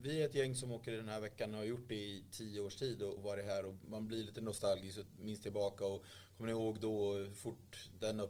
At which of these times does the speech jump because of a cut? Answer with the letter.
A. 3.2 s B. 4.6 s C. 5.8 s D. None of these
A